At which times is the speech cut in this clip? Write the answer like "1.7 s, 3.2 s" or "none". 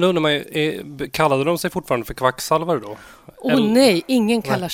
none